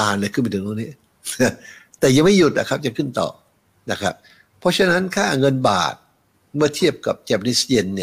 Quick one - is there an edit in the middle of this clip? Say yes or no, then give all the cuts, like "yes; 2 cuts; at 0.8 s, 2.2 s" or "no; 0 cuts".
no; 0 cuts